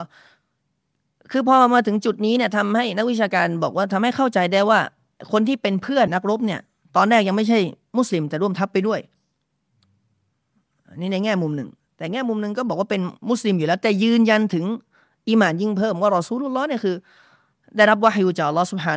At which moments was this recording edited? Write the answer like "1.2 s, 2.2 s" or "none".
6.1 s, 13.2 s